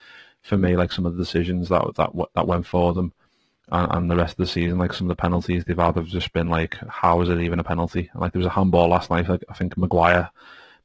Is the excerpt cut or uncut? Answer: uncut